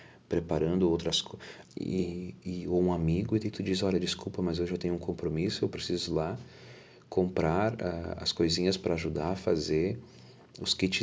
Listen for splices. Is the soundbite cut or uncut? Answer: cut